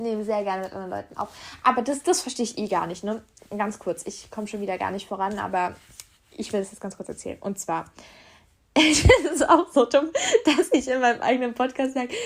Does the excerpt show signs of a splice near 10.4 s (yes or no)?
no